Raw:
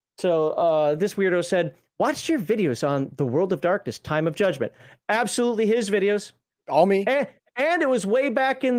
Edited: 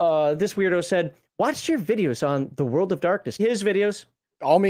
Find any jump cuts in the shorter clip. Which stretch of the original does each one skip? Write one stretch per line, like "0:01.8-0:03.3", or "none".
0:04.0-0:05.7